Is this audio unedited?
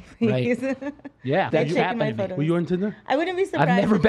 no; 1 cut; at 1.5 s

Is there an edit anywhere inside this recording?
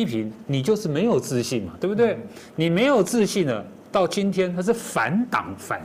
no; 0 cuts

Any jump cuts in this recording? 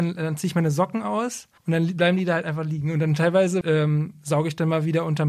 yes; 2 cuts; at 1.6 s, 3.6 s

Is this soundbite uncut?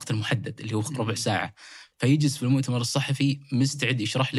yes; 0 cuts

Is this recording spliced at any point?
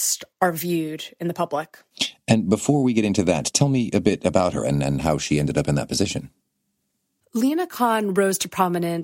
no; 0 cuts

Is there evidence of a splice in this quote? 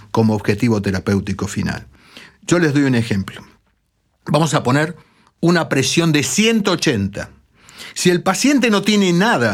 no; 0 cuts

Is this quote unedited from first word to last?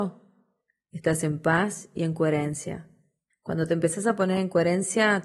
no; 1 cut; at 3.3 s

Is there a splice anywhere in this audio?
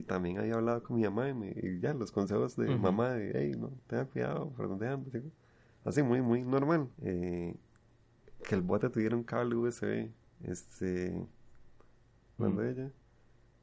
yes; 3 cuts; at 7.0 s, 10.2 s, 12.4 s

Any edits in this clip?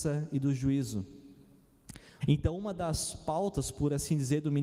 yes; 1 cut; at 2.2 s

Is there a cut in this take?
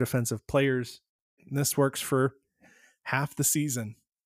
yes; 1 cut; at 1.4 s

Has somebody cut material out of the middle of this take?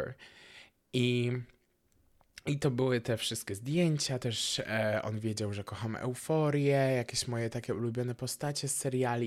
no; 0 cuts

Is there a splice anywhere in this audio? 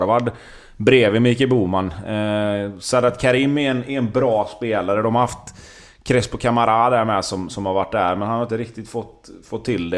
no; 0 cuts

